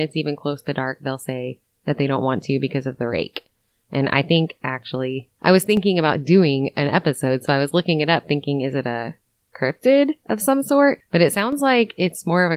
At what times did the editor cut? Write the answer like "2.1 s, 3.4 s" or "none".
none